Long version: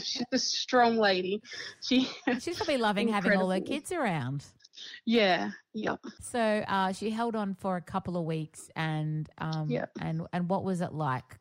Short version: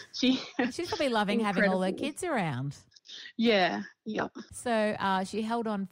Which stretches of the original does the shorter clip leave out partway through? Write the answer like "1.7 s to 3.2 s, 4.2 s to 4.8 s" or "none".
none

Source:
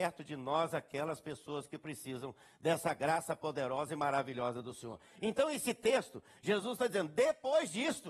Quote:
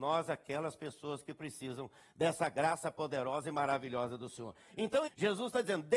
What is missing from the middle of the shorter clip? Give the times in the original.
5.5 s to 6.3 s

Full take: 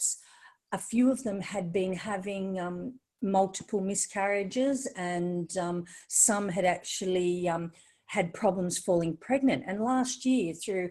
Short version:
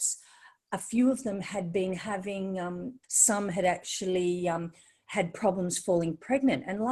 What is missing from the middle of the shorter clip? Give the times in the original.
3.0 s to 6.0 s

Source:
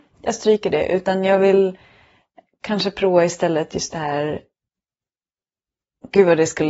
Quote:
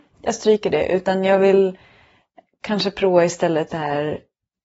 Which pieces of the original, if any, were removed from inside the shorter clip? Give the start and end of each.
3.7 s to 3.9 s

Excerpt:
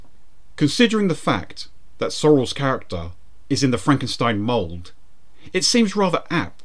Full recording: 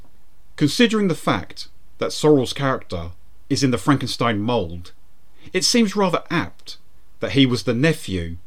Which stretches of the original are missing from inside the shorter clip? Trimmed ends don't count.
none

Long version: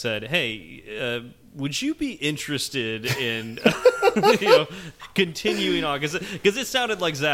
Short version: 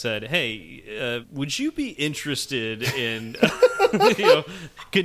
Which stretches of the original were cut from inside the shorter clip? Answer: 1.2 s to 1.4 s

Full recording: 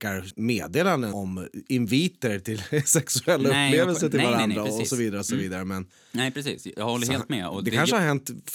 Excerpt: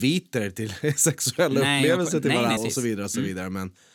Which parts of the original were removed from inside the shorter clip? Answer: 4.5 s to 4.7 s

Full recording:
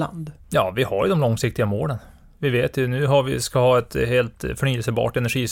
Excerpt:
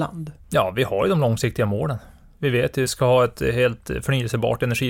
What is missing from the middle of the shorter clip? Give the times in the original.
2.9 s to 3.4 s

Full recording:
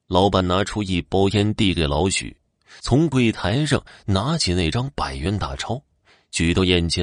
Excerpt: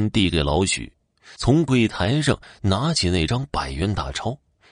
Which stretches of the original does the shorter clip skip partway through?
none

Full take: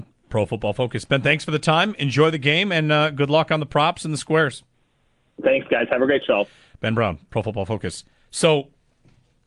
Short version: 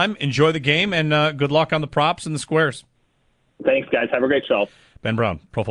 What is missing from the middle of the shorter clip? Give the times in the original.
none

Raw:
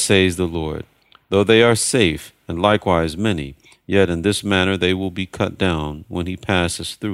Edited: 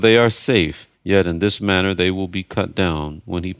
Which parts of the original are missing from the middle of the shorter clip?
2.4 s to 3.8 s

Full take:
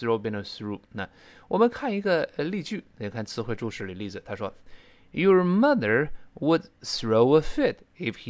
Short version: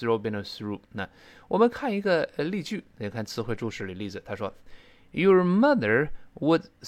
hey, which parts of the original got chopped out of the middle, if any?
none

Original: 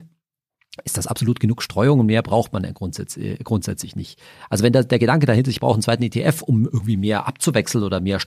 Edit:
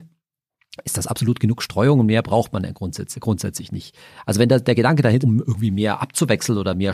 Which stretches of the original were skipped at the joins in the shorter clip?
3.1 s to 3.4 s, 5.4 s to 6.5 s

